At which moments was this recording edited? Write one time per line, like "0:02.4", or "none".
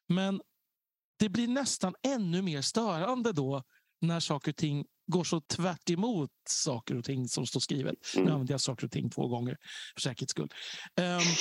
0:05.5